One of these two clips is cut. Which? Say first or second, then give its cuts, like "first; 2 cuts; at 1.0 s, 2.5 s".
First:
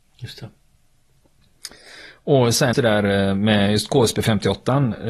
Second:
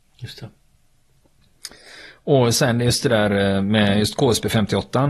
first; 1 cut; at 2.7 s